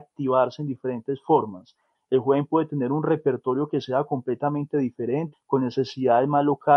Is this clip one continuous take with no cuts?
no; 2 cuts; at 1.9 s, 5.3 s

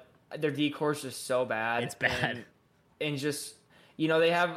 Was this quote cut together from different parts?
no; 0 cuts

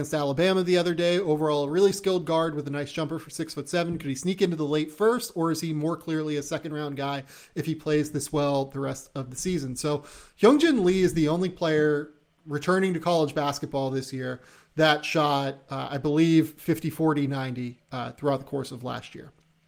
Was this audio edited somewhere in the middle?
no; 0 cuts

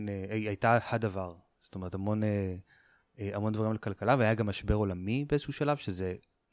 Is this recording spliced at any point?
no; 0 cuts

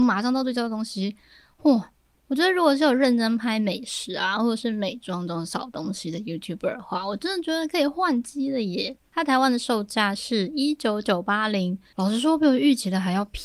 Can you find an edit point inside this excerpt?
no; 0 cuts

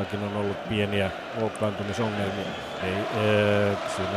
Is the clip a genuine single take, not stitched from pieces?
no; 1 cut; at 2.8 s

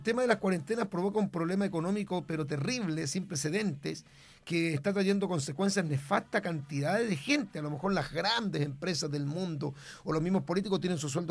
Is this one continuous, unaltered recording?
yes; 0 cuts

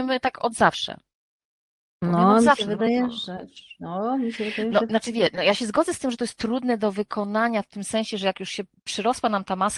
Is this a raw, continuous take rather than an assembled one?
no; 1 cut; at 4.9 s

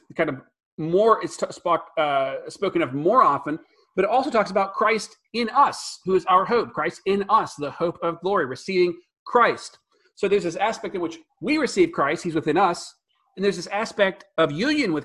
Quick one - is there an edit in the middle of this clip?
no; 0 cuts

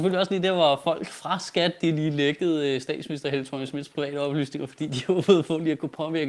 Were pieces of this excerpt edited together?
no; 0 cuts

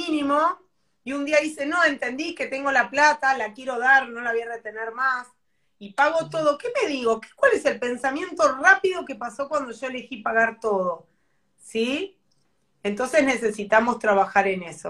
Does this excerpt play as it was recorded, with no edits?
yes; 0 cuts

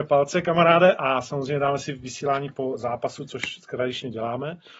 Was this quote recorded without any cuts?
yes; 0 cuts

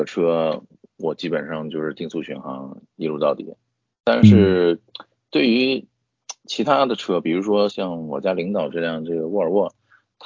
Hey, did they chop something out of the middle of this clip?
yes; 1 cut; at 7.7 s

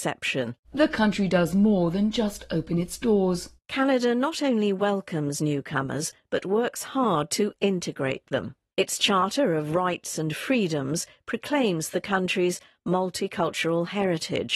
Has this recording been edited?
no; 0 cuts

